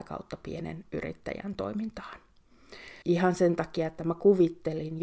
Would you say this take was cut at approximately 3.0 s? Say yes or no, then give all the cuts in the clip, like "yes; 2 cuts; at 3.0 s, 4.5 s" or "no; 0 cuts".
yes; 1 cut; at 3.0 s